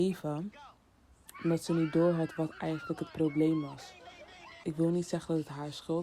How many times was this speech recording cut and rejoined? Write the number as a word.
one